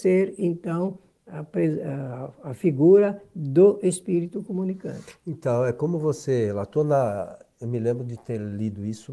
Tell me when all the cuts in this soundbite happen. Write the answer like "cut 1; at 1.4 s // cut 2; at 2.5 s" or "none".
none